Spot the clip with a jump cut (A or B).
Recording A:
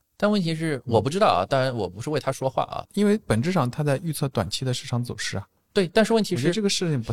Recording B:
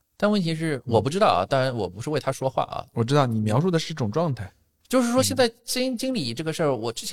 A